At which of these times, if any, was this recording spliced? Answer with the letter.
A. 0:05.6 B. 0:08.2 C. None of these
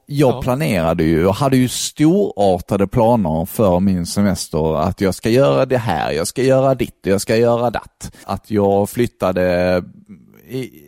B